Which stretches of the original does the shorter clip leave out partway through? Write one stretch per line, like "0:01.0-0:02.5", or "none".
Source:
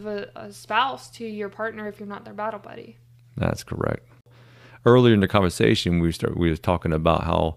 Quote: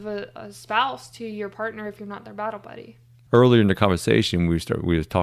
0:03.3-0:04.8